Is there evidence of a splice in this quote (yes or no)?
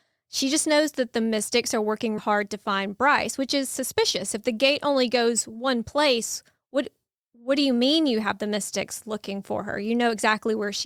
yes